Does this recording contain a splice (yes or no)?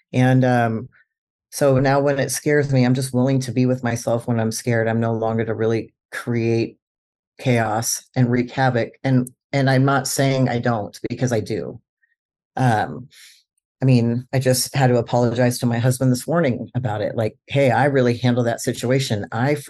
no